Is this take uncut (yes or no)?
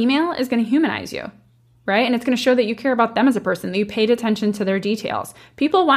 yes